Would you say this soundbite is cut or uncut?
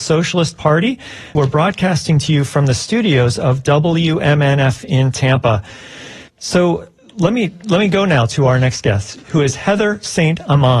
cut